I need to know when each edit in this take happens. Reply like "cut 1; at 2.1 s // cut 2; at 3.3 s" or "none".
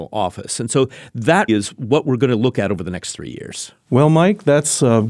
cut 1; at 1.5 s